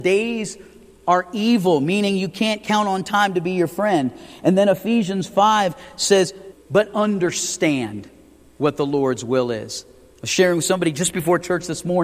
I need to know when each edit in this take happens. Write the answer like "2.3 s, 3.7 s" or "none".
6.5 s